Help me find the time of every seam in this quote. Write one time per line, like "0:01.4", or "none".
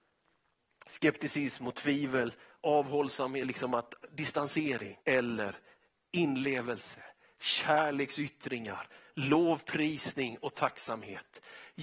0:05.0